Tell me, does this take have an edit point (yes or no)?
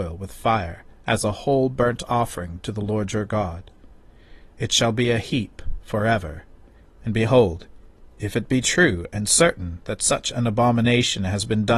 yes